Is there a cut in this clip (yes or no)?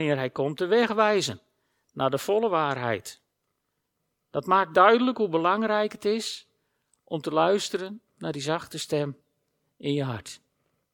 yes